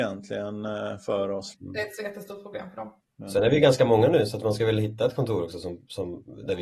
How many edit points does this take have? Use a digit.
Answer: 2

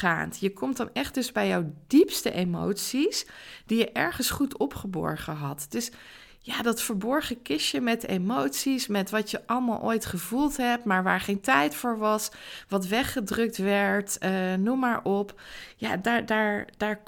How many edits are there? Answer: 0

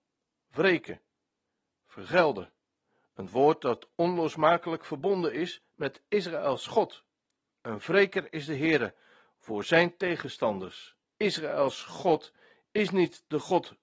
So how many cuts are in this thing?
2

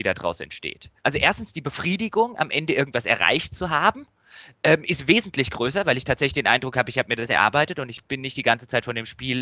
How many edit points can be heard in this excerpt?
0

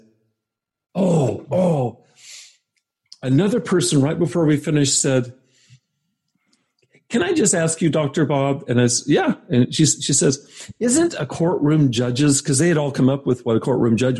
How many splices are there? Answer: 0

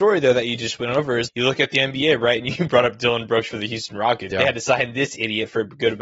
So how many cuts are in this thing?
2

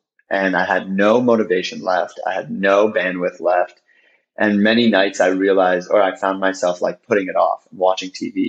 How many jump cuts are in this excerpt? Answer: 0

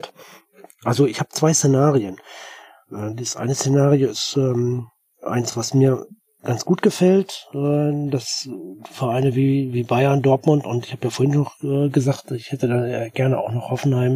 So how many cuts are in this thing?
0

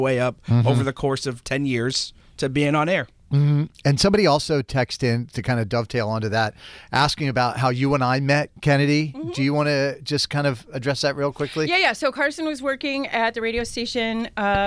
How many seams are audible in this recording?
0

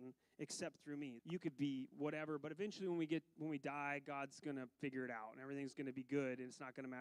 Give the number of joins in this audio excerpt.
1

